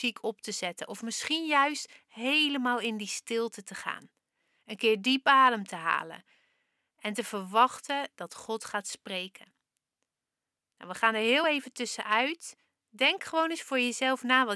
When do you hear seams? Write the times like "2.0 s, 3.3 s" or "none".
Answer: none